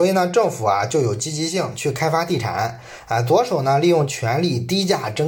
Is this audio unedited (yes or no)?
yes